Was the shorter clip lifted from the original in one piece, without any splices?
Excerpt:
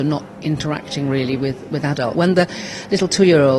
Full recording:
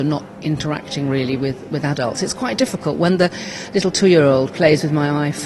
no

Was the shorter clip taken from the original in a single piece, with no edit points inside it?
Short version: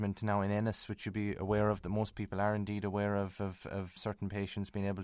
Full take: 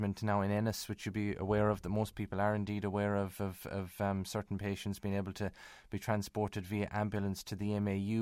no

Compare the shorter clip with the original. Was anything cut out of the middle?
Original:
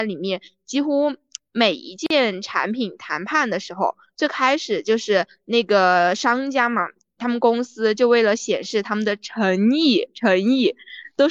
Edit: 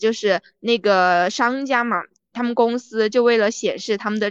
no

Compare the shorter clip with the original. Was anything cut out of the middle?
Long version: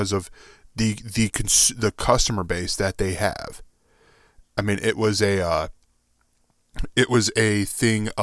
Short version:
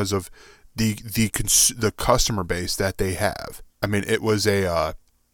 yes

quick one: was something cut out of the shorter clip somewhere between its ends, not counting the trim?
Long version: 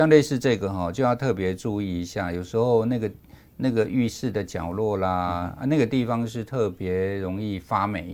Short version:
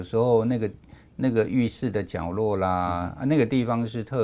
no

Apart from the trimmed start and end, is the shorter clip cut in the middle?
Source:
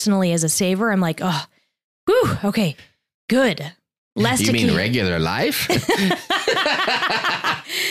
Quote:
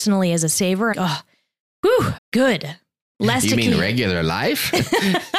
yes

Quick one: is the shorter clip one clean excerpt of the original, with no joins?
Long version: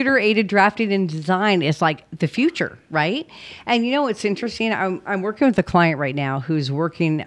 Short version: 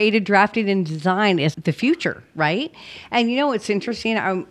no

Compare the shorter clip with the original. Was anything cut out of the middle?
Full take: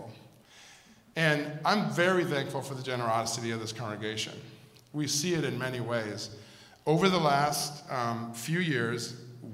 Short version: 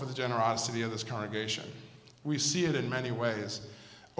no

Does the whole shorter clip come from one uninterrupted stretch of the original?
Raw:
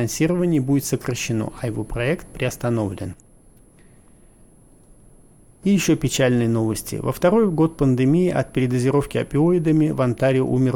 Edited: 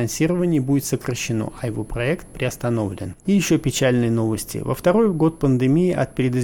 no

